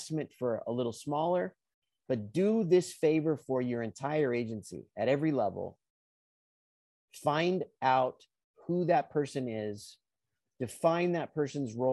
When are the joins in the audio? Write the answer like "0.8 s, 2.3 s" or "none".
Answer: none